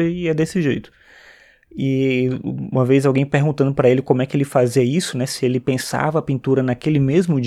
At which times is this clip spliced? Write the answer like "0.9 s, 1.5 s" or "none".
none